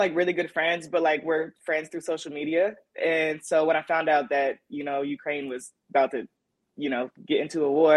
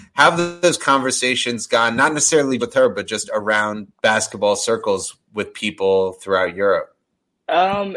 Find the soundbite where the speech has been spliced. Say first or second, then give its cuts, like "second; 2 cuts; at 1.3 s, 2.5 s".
second; 2 cuts; at 2.6 s, 3.9 s